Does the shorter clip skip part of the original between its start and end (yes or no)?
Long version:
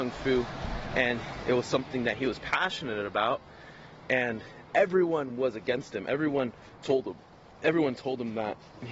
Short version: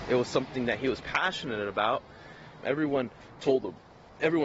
yes